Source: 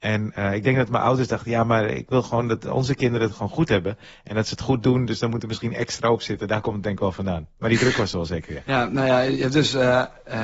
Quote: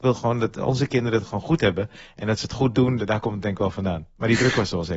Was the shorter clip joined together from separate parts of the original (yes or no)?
yes